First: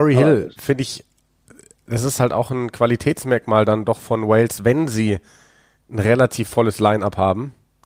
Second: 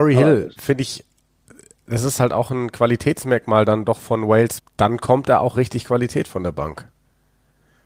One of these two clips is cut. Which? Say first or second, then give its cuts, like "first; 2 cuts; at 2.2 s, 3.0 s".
second; 1 cut; at 4.6 s